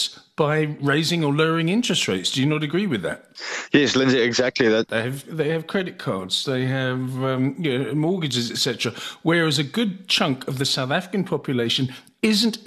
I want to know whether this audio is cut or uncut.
cut